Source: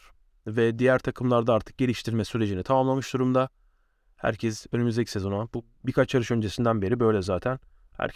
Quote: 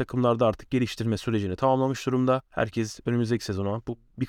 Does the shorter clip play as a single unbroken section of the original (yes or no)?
no